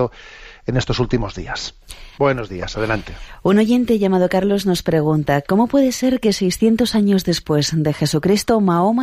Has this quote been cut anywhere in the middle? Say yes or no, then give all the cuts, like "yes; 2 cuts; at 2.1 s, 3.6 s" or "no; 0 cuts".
yes; 1 cut; at 2.2 s